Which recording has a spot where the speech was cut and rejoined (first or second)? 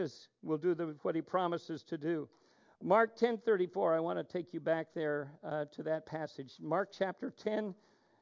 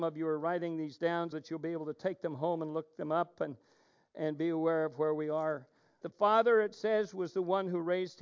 second